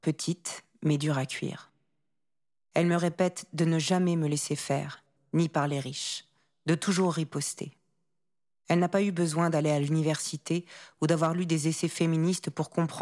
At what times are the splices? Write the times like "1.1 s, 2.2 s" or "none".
5.2 s